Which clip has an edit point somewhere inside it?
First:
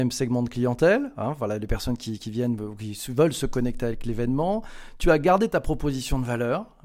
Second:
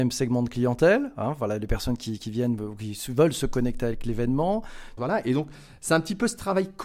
second; 1 cut; at 5.0 s

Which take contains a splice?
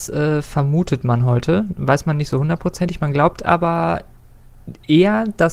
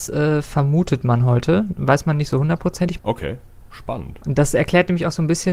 second; 1 cut; at 3.0 s

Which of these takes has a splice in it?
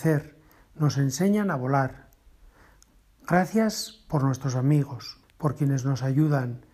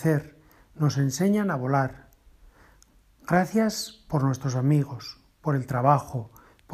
first; 1 cut; at 5.2 s

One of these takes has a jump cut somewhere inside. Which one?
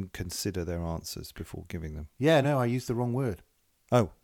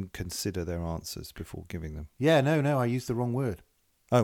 first; 1 cut; at 2.4 s

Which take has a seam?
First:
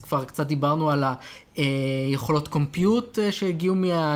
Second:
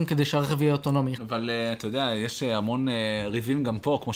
second; 1 cut; at 1.1 s

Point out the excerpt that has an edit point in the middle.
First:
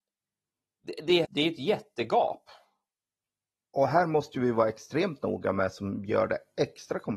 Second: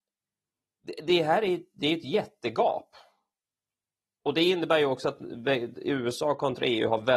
first; 2 cuts; at 1.2 s, 3.6 s

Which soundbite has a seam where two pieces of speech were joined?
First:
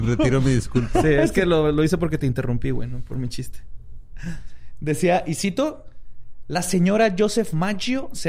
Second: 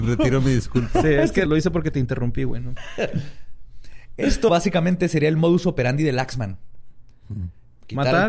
second; 3 cuts; at 1.5 s, 2.8 s, 4.5 s

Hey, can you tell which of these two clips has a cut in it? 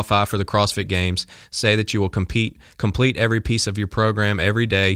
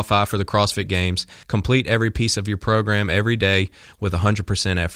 second; 1 cut; at 1.4 s

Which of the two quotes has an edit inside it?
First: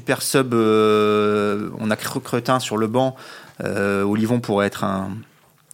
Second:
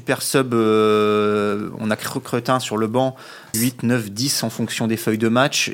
second; 1 cut; at 3.5 s

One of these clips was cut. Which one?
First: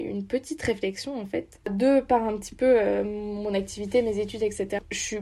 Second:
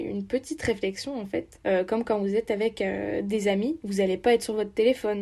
first; 1 cut; at 1.6 s

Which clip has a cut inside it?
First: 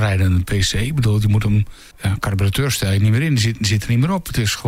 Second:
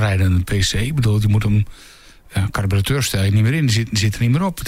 first; 1 cut; at 1.9 s

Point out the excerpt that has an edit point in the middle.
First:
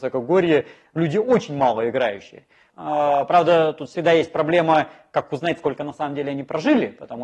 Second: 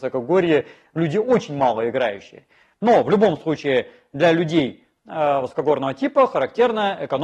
first; 1 cut; at 2.7 s

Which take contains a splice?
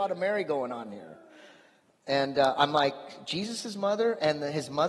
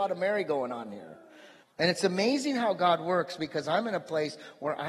second; 1 cut; at 1.6 s

